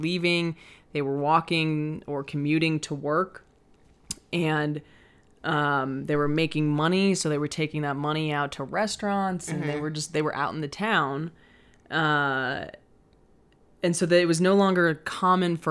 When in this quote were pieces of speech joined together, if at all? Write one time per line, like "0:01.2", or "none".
none